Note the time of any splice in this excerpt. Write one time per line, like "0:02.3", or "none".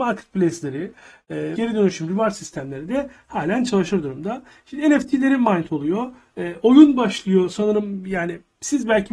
0:01.5